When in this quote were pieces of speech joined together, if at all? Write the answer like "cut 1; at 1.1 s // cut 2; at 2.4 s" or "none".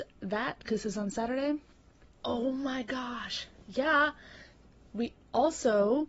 cut 1; at 2.2 s